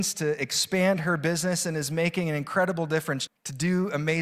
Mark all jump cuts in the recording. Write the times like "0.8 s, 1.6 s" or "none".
3.3 s